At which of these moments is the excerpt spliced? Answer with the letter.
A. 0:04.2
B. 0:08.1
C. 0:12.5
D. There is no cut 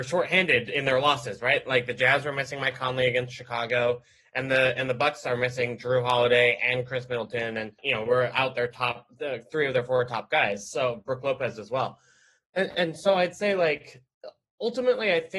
B